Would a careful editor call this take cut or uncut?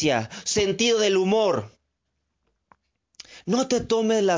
uncut